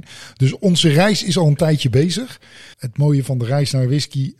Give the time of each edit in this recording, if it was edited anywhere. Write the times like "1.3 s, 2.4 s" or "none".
2.7 s